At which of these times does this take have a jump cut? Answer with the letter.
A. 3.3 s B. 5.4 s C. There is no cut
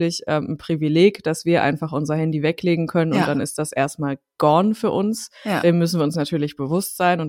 C